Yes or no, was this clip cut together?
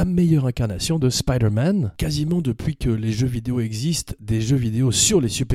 no